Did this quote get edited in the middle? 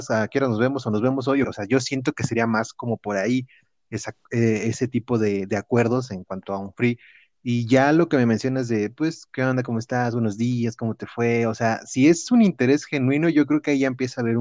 yes; 1 cut; at 1.4 s

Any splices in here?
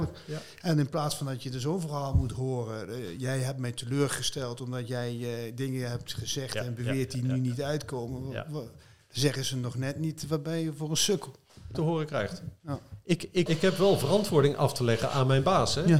yes; 2 cuts; at 11.7 s, 13.5 s

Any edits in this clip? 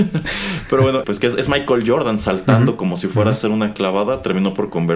yes; 1 cut; at 1.0 s

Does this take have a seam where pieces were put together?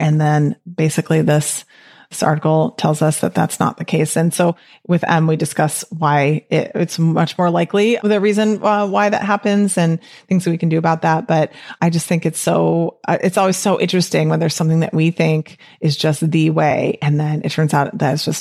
no; 0 cuts

